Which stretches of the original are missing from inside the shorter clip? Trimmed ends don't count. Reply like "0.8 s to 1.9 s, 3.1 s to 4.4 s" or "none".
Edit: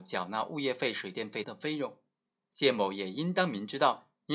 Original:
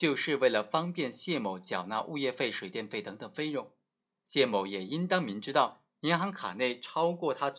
3.0 s to 3.2 s

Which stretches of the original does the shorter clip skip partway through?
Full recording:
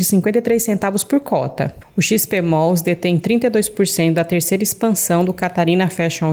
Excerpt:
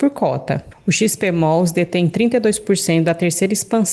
none

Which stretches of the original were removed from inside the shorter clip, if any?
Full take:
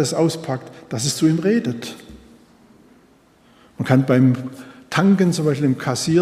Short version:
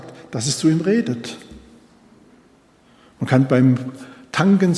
none

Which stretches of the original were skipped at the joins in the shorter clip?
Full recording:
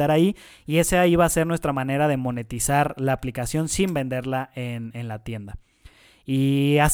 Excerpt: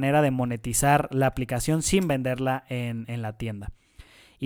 none

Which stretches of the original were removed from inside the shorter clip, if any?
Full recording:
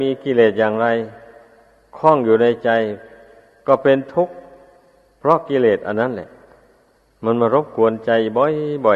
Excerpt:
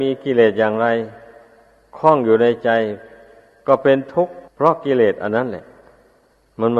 4.5 s to 5.1 s

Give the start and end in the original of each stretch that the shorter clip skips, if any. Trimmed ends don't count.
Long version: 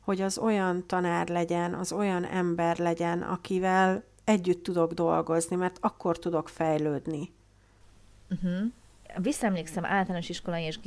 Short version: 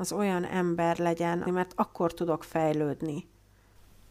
3.2 s to 5.5 s

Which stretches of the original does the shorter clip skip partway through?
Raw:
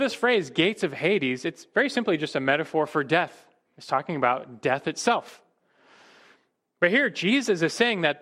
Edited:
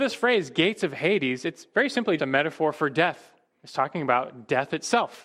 2.2 s to 2.3 s

